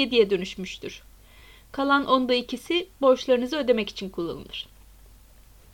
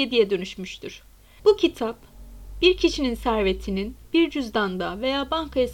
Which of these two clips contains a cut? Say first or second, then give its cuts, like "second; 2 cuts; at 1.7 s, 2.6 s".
second; 1 cut; at 1.4 s